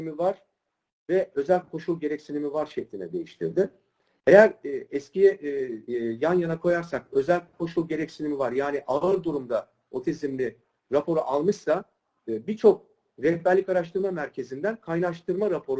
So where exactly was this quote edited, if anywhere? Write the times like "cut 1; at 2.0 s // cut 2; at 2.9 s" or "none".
cut 1; at 5.9 s